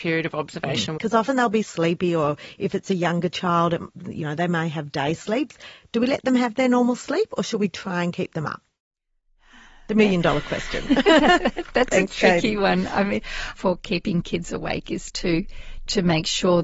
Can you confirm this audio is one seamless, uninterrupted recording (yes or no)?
no